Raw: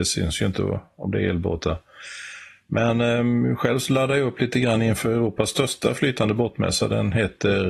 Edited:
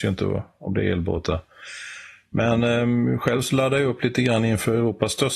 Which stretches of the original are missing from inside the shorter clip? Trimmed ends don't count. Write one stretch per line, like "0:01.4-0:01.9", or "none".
none